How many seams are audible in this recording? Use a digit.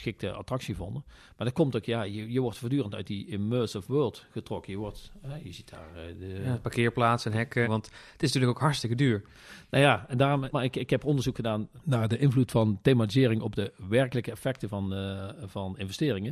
2